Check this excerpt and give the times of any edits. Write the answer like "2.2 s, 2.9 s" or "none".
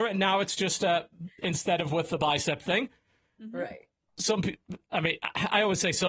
none